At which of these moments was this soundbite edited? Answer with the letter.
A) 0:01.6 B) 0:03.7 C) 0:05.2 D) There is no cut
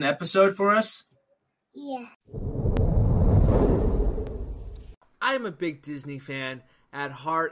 D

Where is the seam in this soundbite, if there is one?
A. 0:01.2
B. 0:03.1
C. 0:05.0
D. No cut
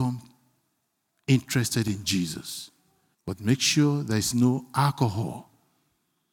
B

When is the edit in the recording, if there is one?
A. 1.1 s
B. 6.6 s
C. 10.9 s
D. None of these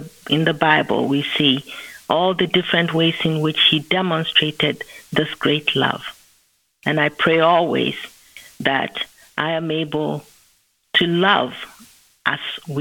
D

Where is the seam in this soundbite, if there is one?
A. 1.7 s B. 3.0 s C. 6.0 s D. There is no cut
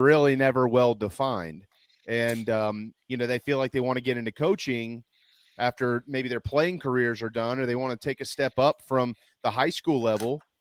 B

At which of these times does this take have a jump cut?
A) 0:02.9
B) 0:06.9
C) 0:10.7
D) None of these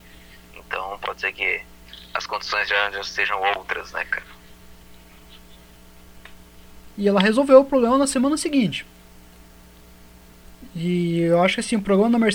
B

